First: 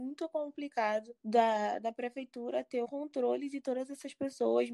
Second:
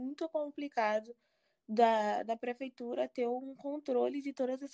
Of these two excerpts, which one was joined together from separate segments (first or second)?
first